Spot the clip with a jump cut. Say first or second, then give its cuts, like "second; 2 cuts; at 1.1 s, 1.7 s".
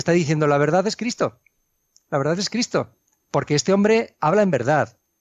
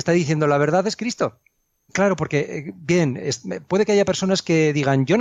second; 1 cut; at 1.9 s